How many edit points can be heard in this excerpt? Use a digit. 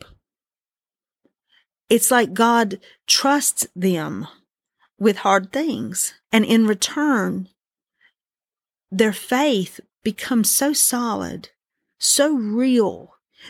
1